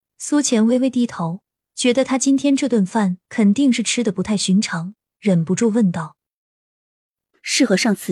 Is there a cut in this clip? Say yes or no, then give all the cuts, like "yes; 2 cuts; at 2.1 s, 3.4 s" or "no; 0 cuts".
no; 0 cuts